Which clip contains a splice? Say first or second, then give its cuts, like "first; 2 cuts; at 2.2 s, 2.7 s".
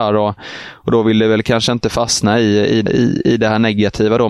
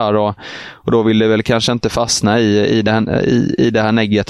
first; 1 cut; at 2.9 s